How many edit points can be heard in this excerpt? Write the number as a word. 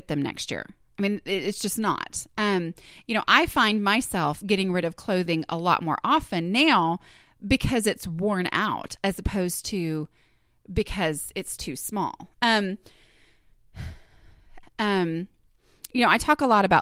two